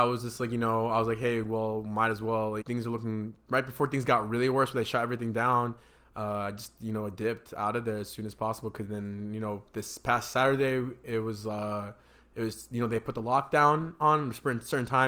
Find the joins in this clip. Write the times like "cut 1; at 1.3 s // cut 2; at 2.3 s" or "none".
cut 1; at 2.6 s